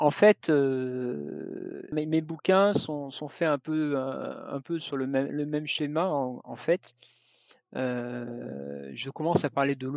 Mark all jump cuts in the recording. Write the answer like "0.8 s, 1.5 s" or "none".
1.9 s